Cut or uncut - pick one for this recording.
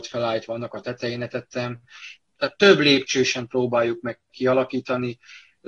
cut